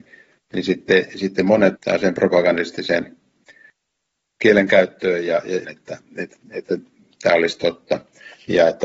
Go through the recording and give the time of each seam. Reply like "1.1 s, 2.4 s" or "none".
1.8 s, 5.6 s